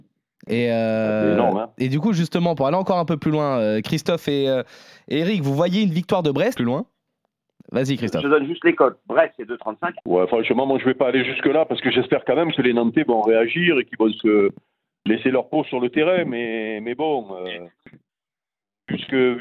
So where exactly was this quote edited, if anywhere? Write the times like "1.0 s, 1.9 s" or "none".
6.6 s, 10.0 s